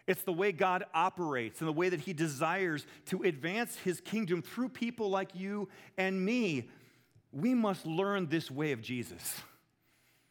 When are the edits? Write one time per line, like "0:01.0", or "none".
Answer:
none